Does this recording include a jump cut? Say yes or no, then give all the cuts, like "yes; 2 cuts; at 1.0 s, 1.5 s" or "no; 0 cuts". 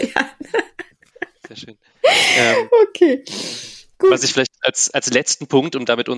no; 0 cuts